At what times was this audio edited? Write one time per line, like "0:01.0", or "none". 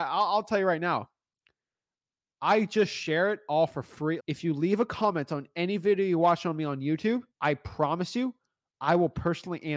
0:04.2
0:07.3